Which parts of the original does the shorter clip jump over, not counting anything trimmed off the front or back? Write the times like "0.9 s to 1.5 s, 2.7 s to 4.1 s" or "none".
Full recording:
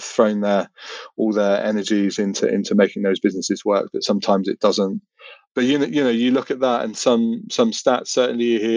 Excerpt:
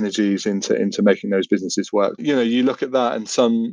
3.9 s to 5.9 s